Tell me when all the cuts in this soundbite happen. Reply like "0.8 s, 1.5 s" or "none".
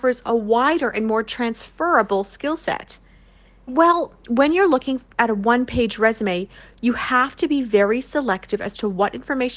3.7 s